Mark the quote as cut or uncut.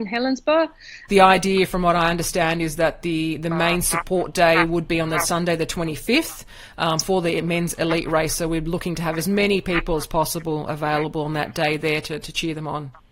cut